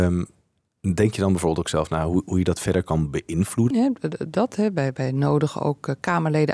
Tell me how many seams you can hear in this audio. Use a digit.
1